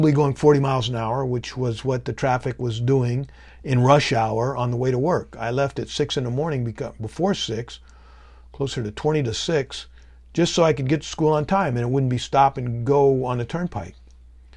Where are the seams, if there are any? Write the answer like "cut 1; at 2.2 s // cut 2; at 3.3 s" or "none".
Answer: none